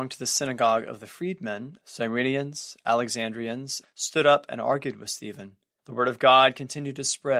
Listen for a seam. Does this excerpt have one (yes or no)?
yes